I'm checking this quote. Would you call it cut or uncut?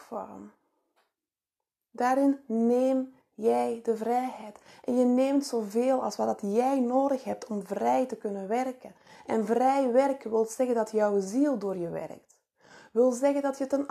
uncut